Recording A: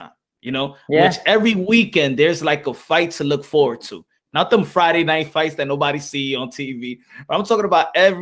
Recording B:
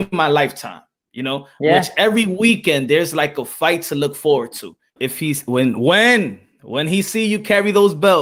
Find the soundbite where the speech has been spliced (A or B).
B